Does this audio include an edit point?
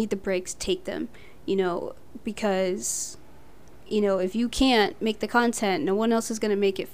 no; 0 cuts

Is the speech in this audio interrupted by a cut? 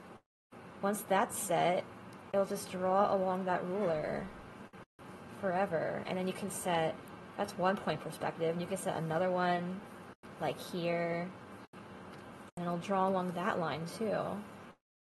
yes; 1 cut; at 6.1 s

